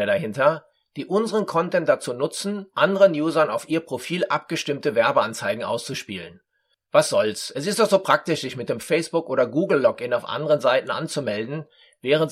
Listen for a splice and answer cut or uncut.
cut